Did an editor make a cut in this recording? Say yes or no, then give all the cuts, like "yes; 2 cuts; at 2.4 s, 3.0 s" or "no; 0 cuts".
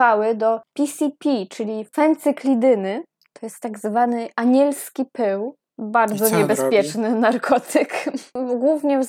no; 0 cuts